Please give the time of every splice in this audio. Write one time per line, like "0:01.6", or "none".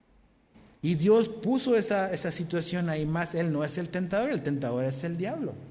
none